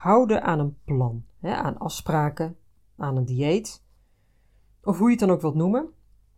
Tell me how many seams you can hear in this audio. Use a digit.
1